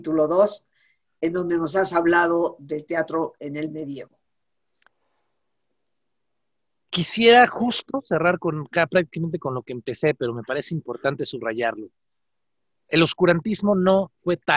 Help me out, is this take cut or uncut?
uncut